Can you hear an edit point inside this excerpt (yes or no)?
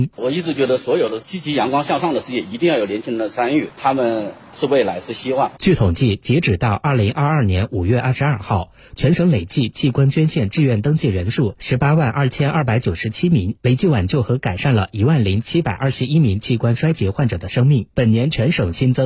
yes